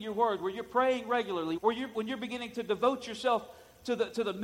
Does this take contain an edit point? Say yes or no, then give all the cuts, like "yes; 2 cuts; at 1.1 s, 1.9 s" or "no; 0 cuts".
yes; 1 cut; at 1.6 s